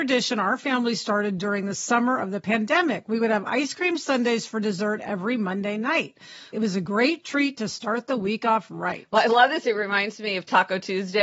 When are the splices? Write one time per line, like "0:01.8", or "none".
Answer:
0:06.5